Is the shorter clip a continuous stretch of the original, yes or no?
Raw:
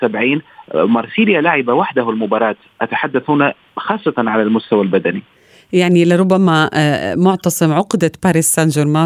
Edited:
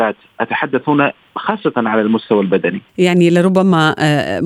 no